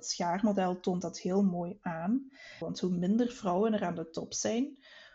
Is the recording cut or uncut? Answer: cut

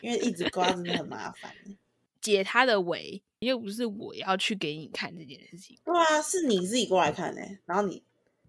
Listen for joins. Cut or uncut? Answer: cut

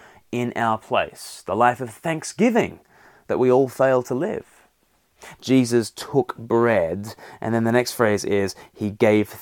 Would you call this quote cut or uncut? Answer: cut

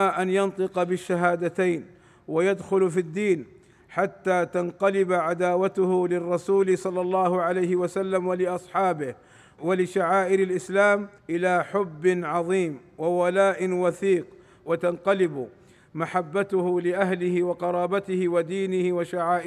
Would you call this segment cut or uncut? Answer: cut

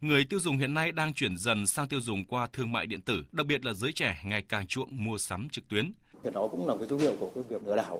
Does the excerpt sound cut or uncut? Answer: cut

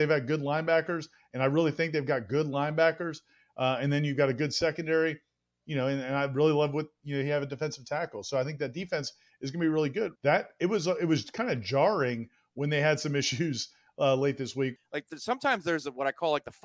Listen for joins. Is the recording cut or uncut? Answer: cut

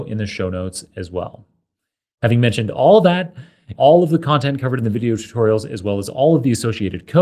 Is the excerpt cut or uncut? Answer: cut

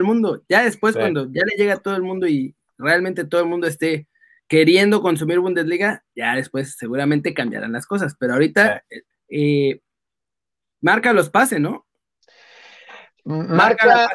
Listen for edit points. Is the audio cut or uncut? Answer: cut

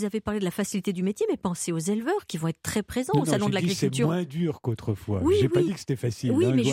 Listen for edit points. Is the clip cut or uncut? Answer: uncut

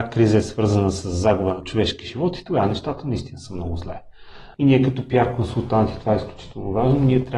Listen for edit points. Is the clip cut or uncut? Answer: cut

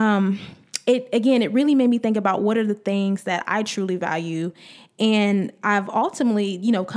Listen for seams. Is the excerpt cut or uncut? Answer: uncut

